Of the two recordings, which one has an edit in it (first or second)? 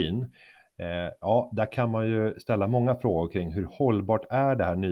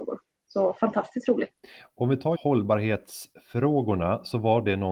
second